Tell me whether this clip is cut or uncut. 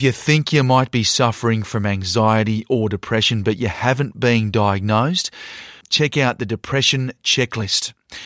cut